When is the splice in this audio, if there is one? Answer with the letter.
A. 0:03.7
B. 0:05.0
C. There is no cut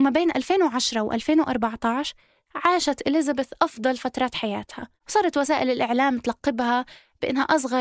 B